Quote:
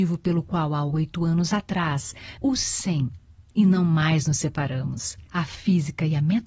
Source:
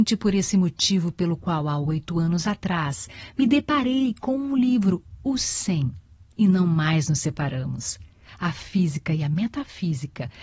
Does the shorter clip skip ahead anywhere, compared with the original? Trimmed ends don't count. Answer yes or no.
yes